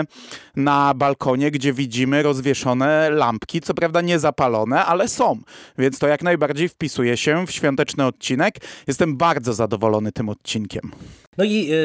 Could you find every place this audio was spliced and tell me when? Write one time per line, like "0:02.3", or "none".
none